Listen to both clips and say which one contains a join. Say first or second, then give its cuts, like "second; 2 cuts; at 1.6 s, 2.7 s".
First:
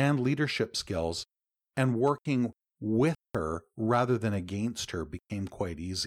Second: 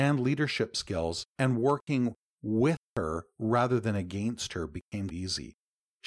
second; 2 cuts; at 1.3 s, 5.1 s